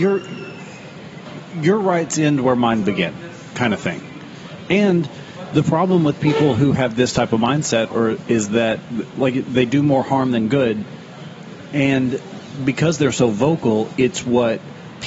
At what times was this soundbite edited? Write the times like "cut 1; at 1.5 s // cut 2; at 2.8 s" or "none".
cut 1; at 4.7 s